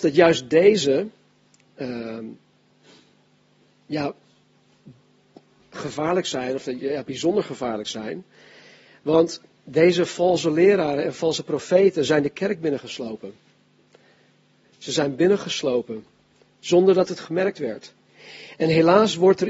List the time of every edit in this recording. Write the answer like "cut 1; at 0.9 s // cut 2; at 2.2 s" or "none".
cut 1; at 14.6 s